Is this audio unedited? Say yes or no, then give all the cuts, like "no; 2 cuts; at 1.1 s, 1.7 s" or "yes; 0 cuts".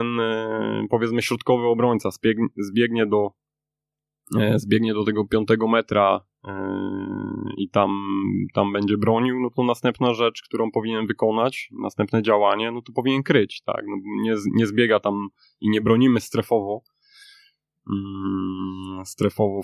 yes; 0 cuts